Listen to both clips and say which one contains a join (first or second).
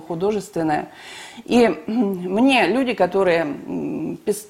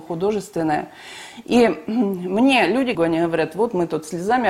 second